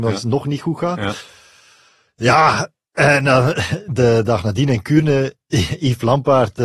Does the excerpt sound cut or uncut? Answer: uncut